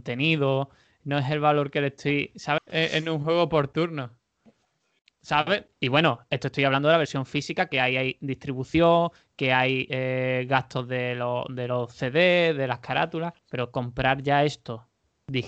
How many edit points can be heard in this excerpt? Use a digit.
3